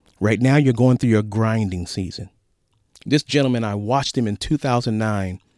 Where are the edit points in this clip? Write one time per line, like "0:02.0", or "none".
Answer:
0:02.9